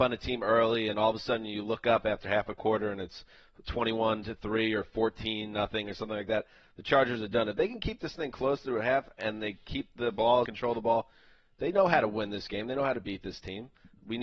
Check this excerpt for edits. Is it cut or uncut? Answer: cut